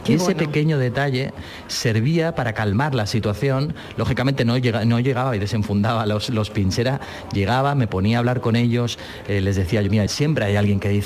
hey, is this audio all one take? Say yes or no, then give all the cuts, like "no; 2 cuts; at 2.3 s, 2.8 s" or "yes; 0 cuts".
no; 1 cut; at 10.1 s